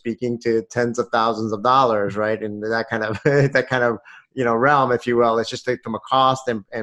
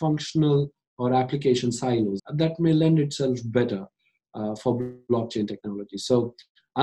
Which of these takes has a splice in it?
second; 1 cut; at 2.2 s

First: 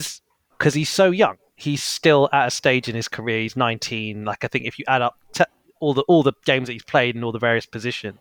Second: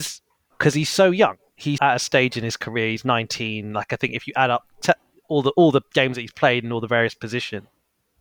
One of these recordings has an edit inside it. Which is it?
second; 1 cut; at 1.8 s

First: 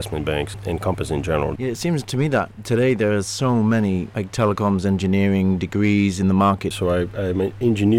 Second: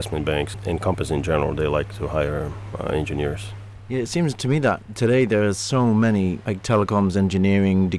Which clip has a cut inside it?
first; 2 cuts; at 1.6 s, 6.7 s

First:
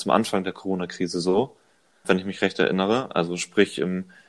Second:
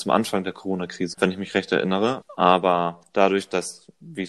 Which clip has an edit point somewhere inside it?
second; 2 cuts; at 1.1 s, 2.2 s

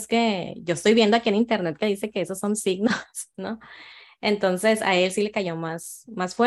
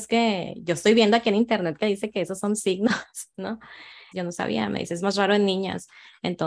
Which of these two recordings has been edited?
second; 1 cut; at 4.1 s

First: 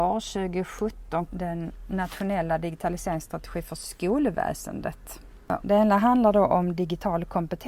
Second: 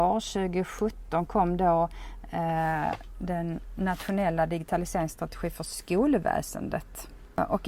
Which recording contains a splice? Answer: first; 2 cuts; at 1.3 s, 5.6 s

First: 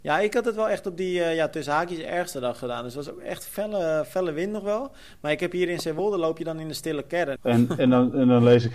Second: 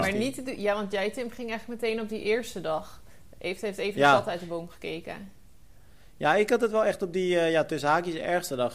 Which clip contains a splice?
first; 1 cut; at 7.4 s

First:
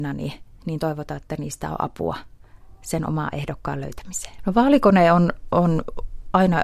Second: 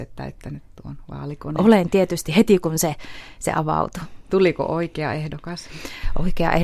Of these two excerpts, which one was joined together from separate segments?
first; 1 cut; at 4.4 s

